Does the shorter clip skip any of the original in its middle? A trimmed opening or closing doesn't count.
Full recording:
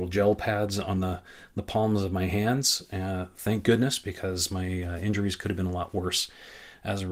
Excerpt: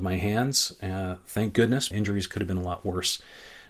yes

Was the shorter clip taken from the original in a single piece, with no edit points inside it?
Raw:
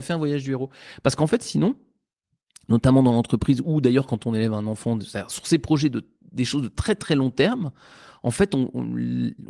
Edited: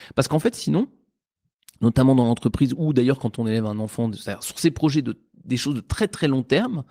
yes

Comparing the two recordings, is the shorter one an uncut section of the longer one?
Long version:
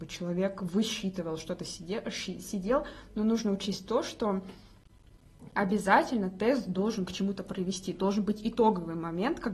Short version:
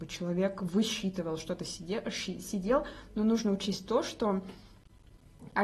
yes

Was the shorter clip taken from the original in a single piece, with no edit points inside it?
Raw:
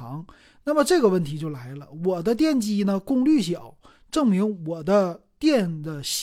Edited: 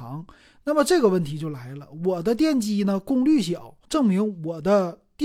no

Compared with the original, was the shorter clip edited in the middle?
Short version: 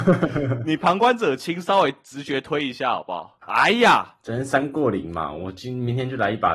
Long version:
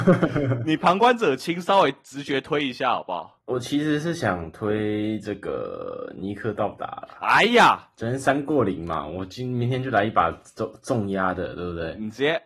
yes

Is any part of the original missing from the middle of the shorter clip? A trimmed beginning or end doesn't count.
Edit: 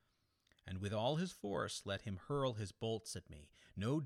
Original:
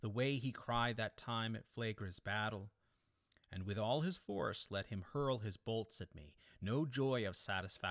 no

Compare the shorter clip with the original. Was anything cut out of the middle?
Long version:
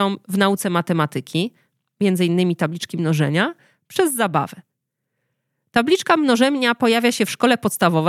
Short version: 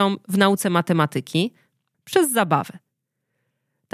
yes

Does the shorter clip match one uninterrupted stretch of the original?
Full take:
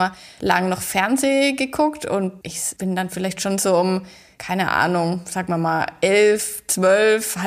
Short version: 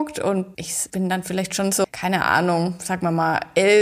no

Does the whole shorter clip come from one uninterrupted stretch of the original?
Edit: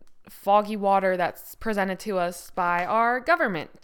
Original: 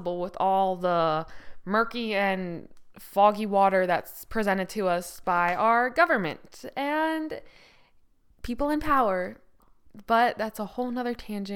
yes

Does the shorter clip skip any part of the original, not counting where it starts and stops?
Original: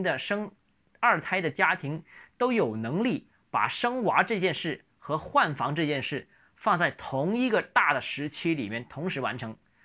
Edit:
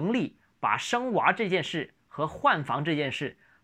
no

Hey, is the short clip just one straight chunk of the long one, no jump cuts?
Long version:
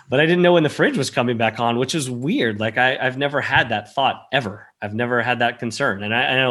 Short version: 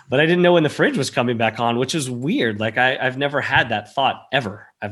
yes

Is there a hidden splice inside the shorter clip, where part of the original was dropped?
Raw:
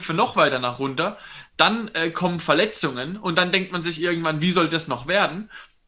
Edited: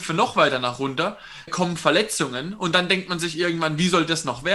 yes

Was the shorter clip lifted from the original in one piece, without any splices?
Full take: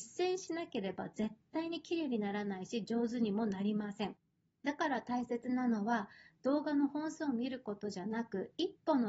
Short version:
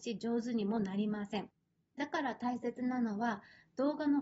yes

